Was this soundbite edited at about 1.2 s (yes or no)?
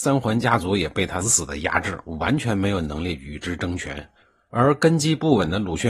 yes